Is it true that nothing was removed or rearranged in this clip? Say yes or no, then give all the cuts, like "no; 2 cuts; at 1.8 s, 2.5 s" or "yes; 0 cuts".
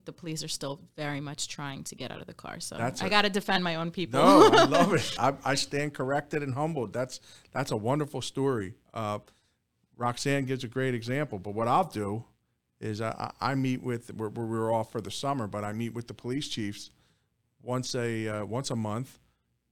no; 1 cut; at 5.2 s